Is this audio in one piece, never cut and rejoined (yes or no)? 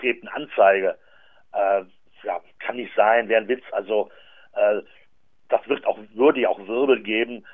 yes